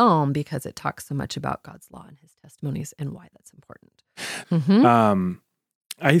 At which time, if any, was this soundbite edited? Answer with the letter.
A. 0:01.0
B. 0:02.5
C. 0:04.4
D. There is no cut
C